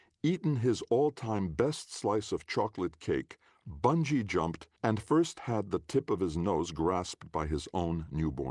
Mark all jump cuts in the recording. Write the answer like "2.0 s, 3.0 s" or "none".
4.8 s

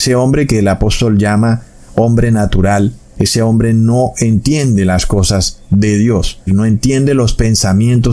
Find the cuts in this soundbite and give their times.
6.5 s

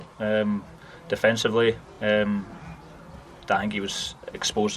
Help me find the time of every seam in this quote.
none

